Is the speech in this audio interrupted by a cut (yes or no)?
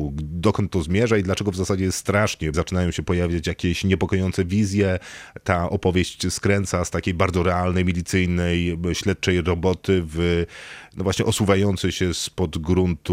yes